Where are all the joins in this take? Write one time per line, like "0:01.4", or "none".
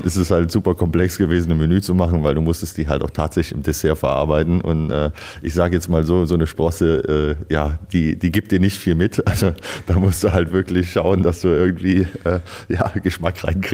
none